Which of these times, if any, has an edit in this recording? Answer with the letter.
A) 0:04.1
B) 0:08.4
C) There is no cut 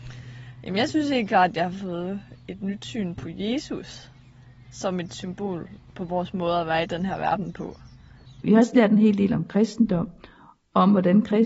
B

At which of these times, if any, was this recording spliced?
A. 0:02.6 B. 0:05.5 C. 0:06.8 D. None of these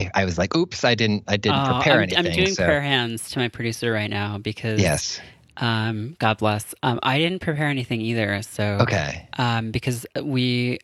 D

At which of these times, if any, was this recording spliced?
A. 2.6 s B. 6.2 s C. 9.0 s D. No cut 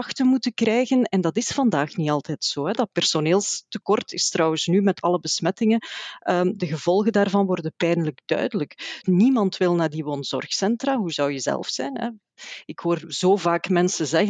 C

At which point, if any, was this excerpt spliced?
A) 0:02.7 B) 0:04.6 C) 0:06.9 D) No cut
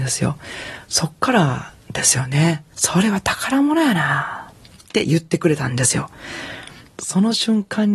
A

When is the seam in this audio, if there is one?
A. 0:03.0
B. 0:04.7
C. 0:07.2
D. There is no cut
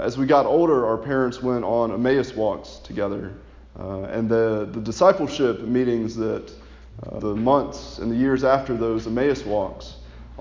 C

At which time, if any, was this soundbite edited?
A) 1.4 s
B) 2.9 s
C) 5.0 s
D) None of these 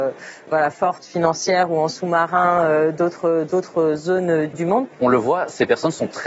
C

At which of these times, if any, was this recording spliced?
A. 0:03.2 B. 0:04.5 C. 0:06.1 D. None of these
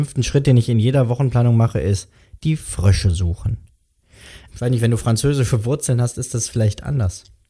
B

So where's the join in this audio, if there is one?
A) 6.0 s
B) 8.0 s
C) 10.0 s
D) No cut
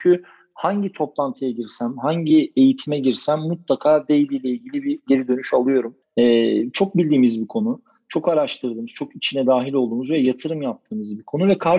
A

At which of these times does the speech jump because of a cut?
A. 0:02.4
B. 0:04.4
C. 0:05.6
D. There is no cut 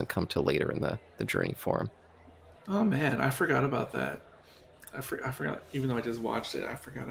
D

